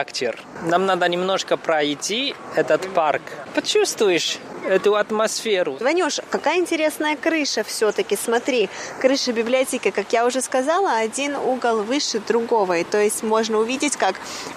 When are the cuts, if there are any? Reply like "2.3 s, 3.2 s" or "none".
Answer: none